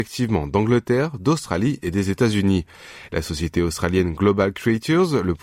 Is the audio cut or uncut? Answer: cut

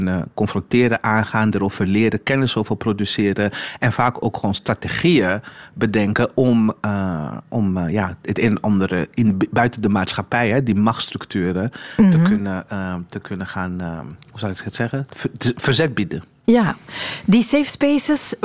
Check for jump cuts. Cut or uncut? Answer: uncut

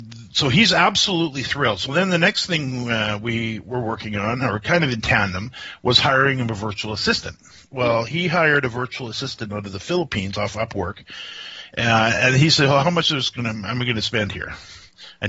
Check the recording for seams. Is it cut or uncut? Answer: uncut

